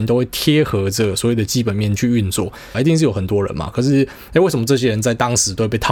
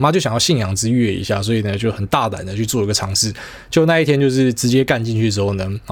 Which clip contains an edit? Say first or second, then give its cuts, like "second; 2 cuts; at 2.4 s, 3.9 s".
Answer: first; 1 cut; at 2.7 s